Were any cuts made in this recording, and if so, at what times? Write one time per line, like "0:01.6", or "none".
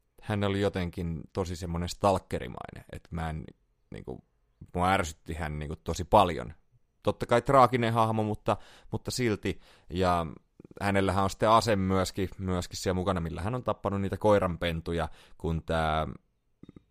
none